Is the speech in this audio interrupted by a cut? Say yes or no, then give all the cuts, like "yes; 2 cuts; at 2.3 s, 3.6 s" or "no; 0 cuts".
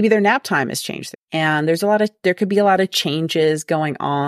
yes; 1 cut; at 1.1 s